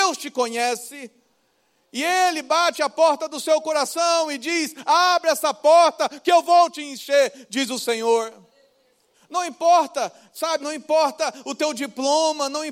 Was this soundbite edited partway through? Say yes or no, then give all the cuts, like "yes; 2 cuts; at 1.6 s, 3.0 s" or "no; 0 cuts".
yes; 2 cuts; at 9.1 s, 10.6 s